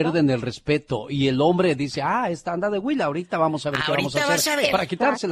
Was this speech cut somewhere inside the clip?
no; 0 cuts

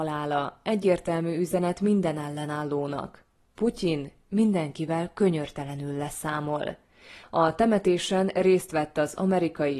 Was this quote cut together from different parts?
yes; 1 cut; at 7.2 s

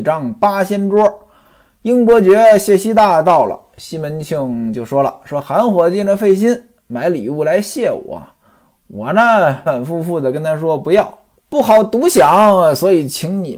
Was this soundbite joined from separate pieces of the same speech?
yes; 2 cuts; at 9.7 s, 11.4 s

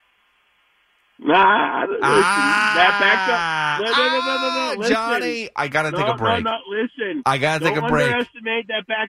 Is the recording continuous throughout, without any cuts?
yes; 0 cuts

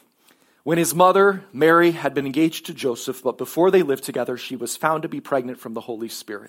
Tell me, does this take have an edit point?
no; 0 cuts

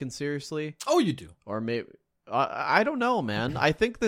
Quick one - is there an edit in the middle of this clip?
no; 0 cuts

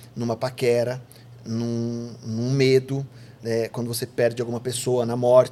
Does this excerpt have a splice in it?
yes; 1 cut; at 3.4 s

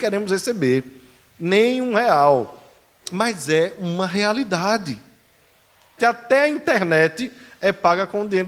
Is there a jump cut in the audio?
yes; 2 cuts; at 3.0 s, 6.0 s

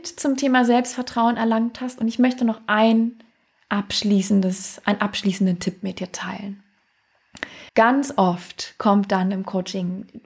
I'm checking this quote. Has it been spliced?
yes; 1 cut; at 7.7 s

